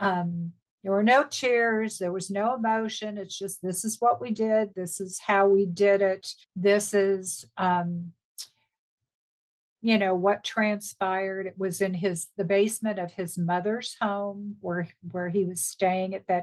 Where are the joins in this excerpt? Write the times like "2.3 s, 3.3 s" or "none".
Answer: 6.4 s